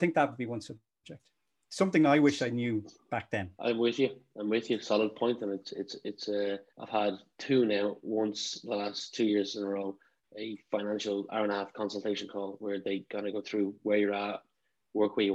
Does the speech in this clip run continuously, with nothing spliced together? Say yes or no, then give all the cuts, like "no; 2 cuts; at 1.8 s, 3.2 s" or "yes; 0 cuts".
no; 2 cuts; at 3.5 s, 6.7 s